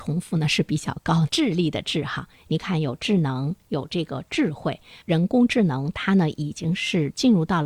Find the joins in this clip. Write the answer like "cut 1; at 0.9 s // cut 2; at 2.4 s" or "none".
cut 1; at 1.3 s